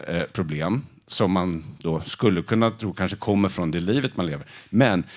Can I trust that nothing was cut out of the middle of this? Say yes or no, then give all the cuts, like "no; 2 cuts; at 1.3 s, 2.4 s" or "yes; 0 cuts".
yes; 0 cuts